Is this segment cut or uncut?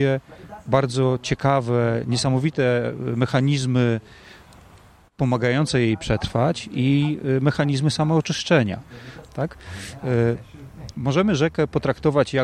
cut